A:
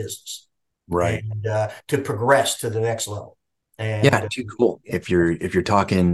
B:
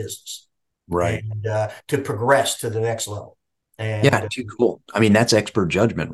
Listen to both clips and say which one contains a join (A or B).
A